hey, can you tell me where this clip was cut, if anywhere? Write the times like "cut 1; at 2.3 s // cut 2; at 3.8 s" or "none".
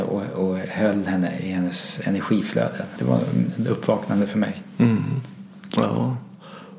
cut 1; at 3.0 s // cut 2; at 5.7 s